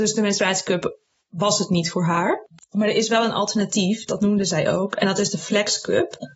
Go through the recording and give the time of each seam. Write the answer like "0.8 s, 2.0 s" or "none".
none